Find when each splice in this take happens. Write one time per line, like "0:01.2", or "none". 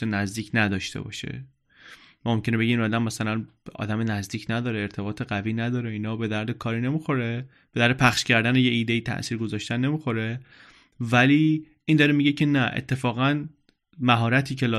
none